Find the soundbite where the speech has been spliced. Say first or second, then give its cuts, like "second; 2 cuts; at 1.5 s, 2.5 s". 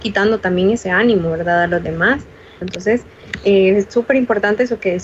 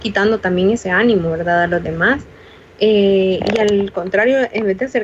first; 1 cut; at 2.6 s